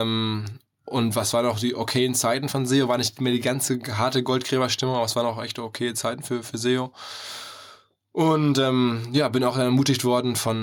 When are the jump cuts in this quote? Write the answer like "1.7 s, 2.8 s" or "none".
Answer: none